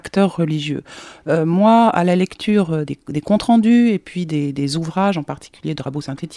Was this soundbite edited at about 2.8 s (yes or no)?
yes